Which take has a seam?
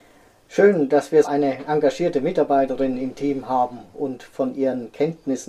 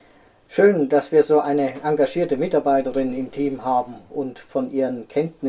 first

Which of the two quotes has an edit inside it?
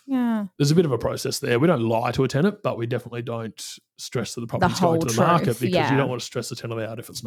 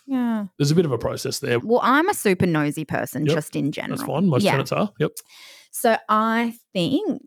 second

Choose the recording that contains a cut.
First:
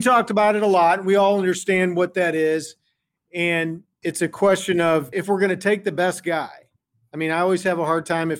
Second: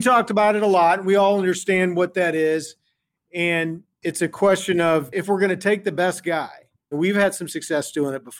second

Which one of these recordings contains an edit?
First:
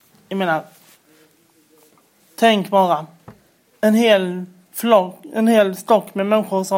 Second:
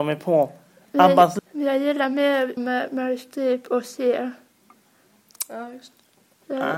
second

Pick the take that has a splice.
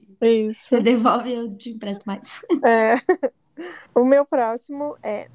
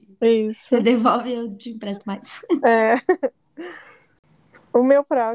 first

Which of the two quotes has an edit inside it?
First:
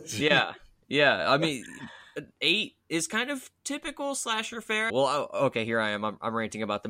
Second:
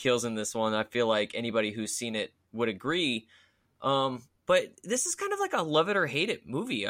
first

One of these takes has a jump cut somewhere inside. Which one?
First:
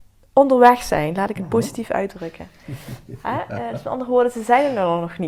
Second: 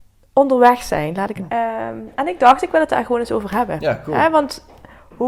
second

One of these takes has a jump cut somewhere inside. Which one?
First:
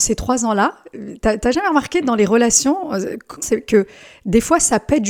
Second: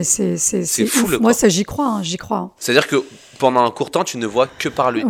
first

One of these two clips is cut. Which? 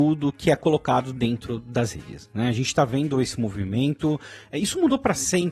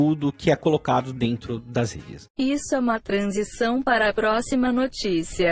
second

